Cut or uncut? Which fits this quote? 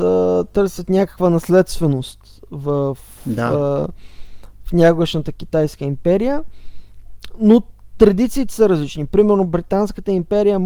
uncut